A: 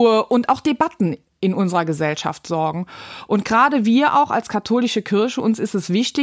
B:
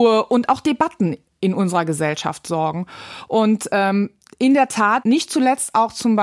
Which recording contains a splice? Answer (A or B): B